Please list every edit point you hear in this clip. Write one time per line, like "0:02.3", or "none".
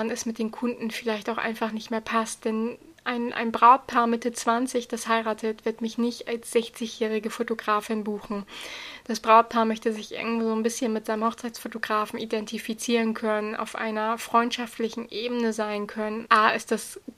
0:16.2